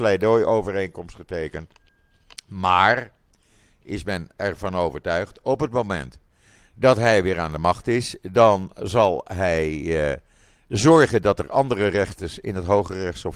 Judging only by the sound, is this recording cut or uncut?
uncut